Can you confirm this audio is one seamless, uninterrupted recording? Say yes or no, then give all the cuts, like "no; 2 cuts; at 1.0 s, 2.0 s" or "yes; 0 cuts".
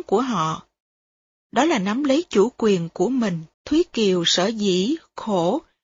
no; 1 cut; at 3.5 s